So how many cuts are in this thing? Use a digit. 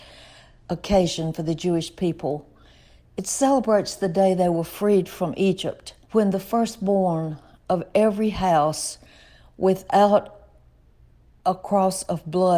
1